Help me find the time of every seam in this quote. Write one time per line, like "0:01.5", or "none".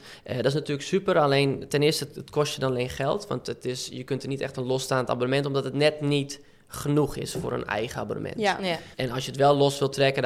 0:08.9